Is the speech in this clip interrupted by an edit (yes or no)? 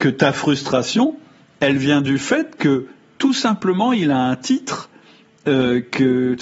no